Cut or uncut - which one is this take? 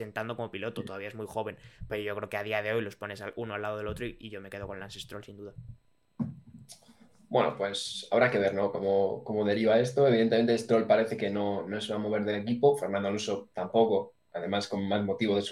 uncut